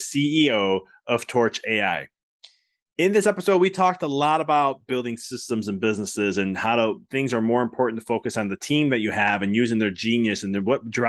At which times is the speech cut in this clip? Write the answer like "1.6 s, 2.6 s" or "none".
none